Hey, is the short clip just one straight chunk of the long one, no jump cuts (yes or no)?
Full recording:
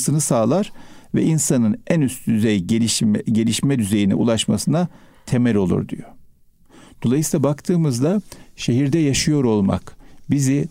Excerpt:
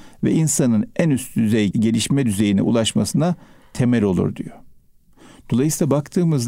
no